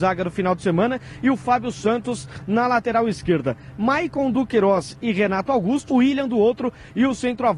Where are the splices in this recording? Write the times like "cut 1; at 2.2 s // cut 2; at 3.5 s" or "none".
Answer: cut 1; at 5.9 s